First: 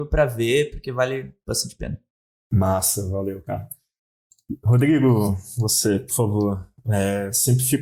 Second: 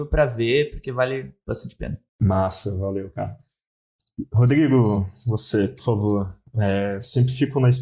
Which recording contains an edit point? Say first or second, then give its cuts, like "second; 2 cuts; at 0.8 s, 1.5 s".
second; 1 cut; at 2.1 s